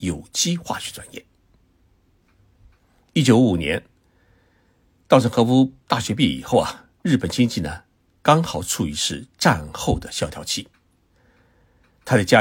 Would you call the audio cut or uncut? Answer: uncut